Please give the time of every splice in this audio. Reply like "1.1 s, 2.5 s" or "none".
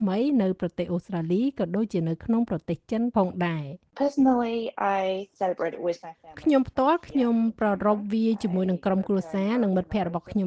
3.9 s